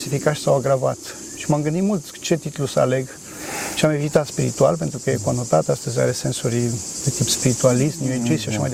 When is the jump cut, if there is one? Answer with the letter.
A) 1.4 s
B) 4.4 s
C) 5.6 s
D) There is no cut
D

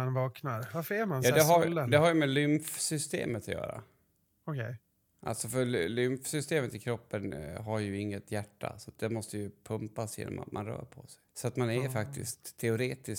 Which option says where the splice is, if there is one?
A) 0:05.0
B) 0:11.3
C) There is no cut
B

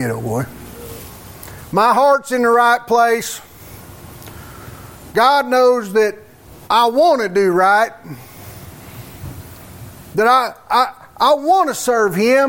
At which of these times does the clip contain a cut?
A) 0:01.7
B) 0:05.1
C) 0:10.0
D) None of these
D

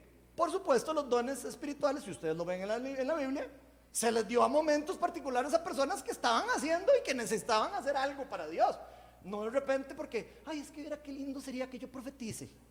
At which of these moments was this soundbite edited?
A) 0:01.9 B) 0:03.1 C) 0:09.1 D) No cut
D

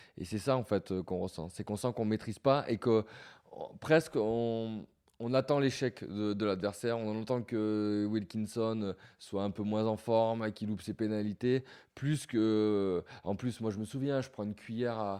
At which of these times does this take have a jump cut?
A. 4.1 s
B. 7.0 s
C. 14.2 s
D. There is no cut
D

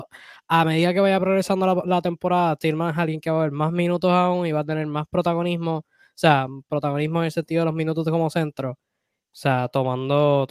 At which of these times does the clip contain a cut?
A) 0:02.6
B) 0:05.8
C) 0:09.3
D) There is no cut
C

